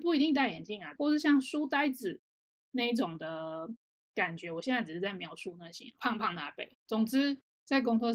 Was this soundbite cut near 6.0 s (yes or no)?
yes